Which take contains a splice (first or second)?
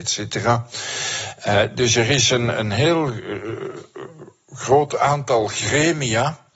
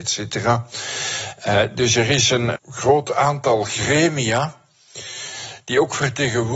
second